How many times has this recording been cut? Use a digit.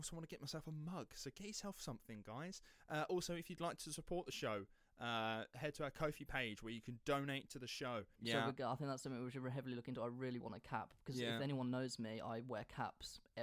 2